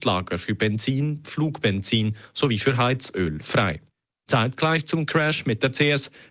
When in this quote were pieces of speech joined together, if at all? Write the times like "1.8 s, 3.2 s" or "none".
1.2 s, 4.3 s